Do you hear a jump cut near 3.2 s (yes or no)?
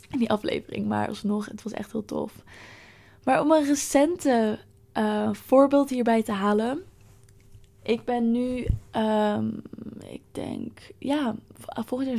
no